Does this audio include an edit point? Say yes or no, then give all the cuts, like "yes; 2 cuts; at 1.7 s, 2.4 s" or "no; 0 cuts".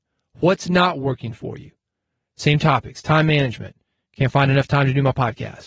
no; 0 cuts